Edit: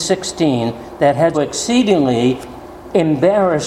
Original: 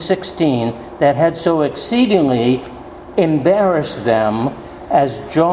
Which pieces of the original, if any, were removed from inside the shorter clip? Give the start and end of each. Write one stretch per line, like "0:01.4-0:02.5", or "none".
0:01.3-0:01.6